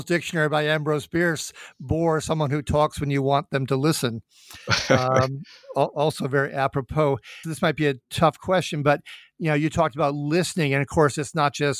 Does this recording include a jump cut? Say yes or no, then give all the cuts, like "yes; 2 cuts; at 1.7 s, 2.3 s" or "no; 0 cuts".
yes; 1 cut; at 7.4 s